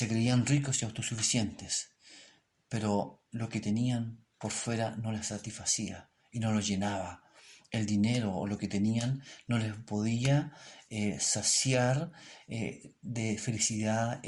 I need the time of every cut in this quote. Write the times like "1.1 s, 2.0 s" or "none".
none

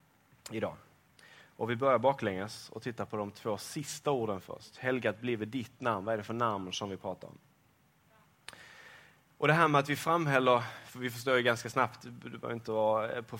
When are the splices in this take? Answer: none

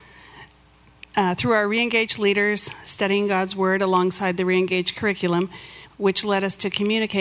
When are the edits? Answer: 5.9 s

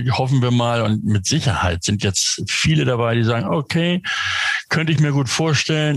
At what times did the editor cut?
none

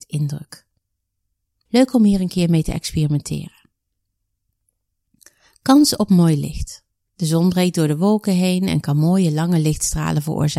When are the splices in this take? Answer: 1.7 s, 7.1 s

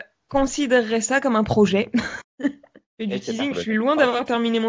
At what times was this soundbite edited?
2.2 s, 3.5 s

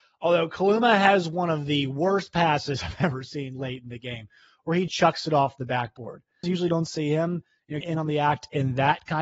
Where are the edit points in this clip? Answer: 4.9 s, 6.4 s, 7.8 s

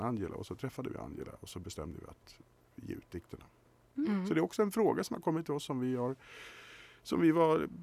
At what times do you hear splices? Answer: none

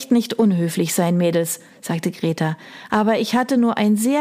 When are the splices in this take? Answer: none

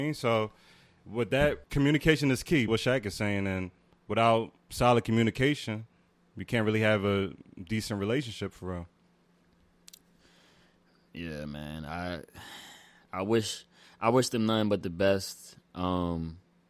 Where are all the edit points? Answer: 1.6 s, 2.7 s

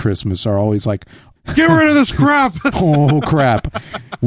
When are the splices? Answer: 1.4 s

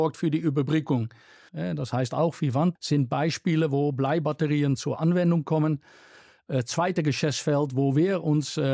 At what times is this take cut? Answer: 1.5 s, 2.8 s

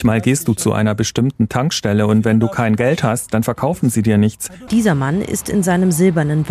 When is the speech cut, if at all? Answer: 4.7 s

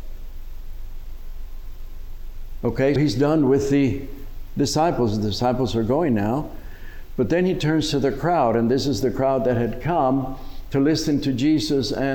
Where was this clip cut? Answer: 3.0 s

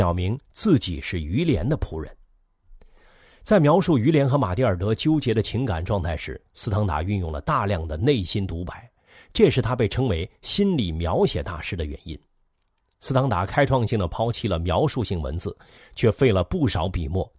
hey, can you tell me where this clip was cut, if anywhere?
15.8 s

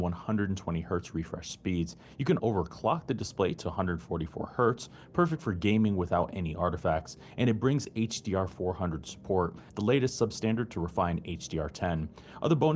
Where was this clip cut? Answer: 2.4 s

